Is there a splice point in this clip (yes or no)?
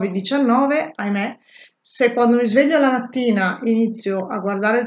no